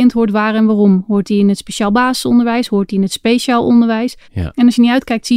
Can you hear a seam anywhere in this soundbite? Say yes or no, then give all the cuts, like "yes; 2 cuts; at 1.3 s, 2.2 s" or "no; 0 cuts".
yes; 1 cut; at 4.2 s